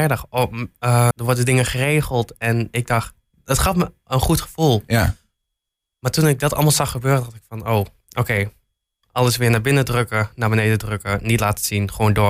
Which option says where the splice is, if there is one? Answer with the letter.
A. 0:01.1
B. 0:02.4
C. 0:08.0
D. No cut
A